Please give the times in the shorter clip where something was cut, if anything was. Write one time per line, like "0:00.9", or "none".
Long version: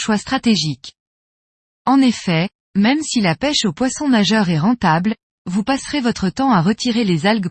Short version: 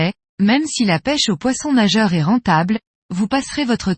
none